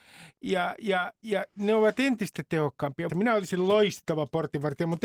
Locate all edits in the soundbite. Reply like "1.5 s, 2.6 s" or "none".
3.1 s